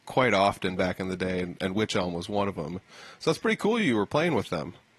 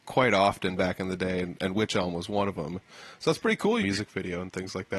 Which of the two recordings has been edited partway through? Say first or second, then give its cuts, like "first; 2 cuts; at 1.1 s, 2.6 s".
second; 1 cut; at 3.8 s